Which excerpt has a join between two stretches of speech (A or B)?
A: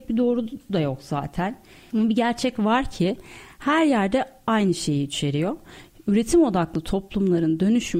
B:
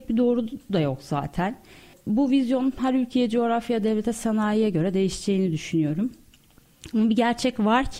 A